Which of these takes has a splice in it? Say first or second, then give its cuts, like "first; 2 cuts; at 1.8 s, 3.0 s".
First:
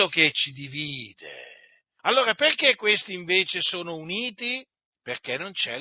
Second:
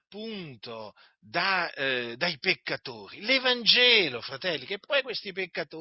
first; 1 cut; at 2.0 s